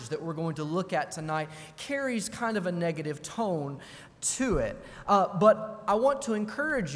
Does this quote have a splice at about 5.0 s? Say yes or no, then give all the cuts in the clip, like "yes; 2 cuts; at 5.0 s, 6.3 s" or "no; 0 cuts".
no; 0 cuts